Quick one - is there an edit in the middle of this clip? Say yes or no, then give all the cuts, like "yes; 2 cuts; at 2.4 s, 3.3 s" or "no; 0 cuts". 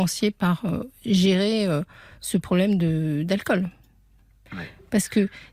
no; 0 cuts